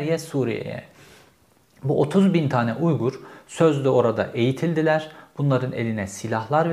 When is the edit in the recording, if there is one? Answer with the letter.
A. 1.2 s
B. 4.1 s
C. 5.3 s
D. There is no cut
D